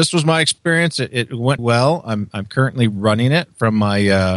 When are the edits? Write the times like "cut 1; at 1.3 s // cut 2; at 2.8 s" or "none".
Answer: cut 1; at 1.6 s